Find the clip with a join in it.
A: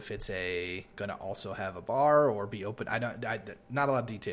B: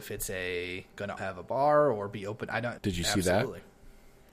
B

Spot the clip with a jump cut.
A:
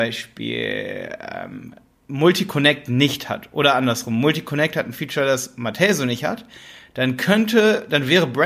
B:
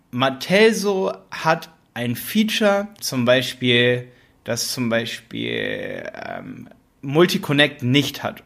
B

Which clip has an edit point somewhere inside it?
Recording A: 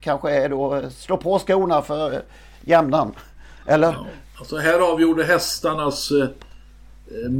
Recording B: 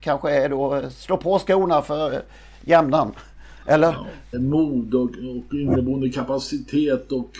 B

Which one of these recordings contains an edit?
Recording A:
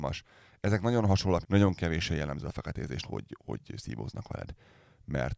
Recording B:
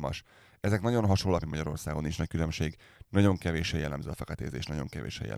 A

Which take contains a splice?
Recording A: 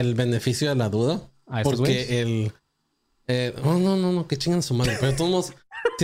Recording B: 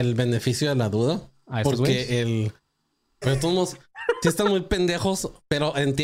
B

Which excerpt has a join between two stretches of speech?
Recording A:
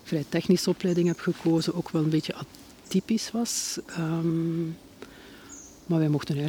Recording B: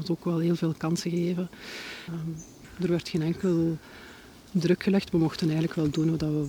B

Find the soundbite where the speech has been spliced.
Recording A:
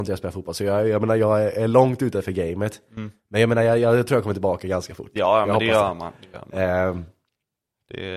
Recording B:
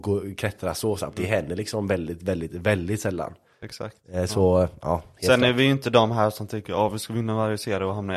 B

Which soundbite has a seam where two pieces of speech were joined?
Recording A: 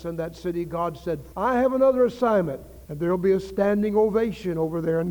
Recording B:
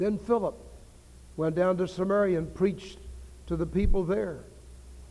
A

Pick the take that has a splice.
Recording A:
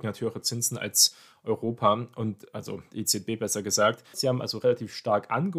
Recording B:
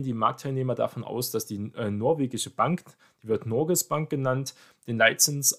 A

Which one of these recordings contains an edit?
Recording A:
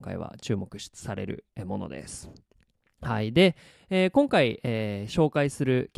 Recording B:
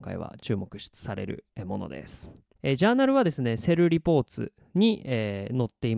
B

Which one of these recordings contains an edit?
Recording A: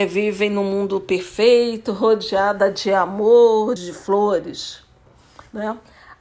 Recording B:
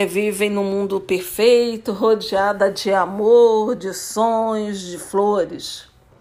A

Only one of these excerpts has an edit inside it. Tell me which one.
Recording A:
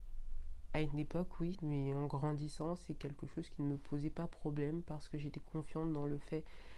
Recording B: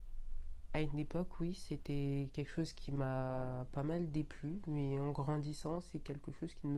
A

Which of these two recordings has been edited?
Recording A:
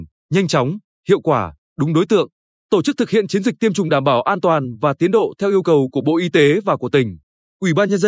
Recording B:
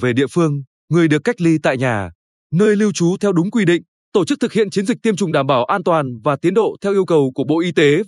B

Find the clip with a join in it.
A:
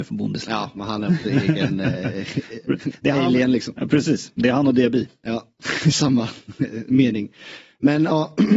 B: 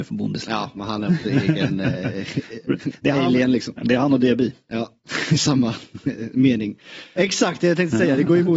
B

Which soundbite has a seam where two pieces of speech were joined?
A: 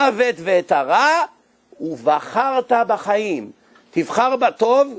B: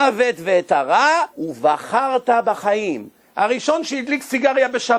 B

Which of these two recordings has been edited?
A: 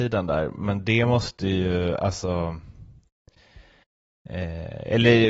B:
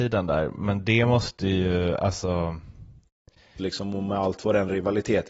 B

